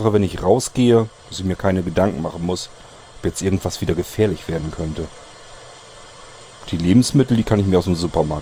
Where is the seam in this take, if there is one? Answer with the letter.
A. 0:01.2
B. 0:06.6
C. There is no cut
A